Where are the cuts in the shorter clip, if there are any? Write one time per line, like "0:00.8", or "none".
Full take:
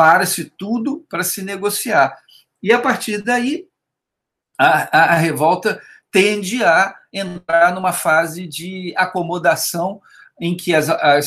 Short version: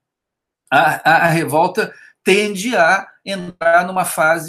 none